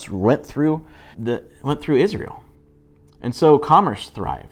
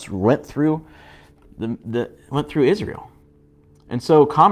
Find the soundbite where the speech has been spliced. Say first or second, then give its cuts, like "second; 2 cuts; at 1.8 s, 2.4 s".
first; 1 cut; at 1.1 s